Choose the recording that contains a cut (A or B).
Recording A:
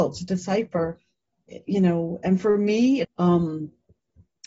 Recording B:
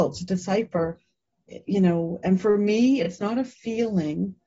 A